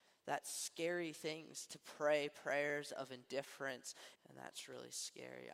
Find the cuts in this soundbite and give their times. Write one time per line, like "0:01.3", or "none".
0:04.2